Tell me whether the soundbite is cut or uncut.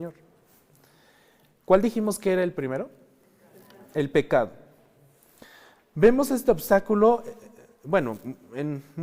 uncut